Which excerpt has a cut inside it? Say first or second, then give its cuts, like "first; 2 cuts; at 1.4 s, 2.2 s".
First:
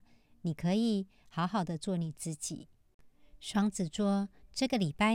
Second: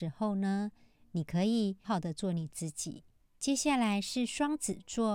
second; 2 cuts; at 1.8 s, 3.2 s